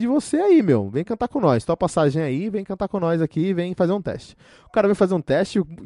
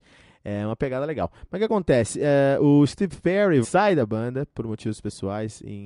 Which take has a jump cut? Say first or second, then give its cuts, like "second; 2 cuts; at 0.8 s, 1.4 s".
second; 1 cut; at 3.6 s